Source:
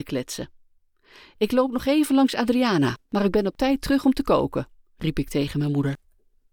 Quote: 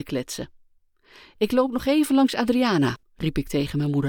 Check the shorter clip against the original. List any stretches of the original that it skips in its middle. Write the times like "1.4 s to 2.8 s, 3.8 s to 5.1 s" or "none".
3.0 s to 4.8 s